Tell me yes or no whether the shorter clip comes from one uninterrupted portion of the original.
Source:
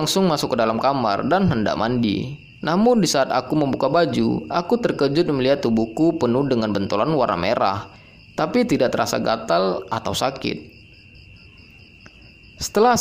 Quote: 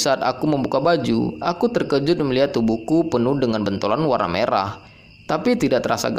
yes